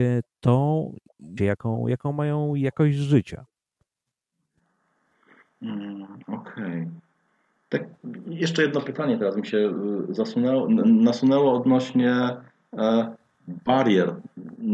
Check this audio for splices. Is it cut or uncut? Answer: cut